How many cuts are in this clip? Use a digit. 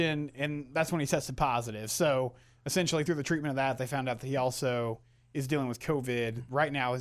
0